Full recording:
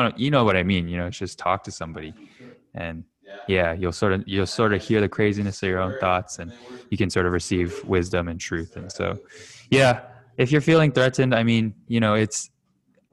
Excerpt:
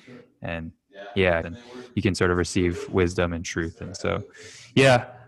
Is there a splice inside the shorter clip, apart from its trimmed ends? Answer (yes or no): yes